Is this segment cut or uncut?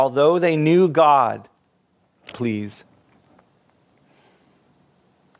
cut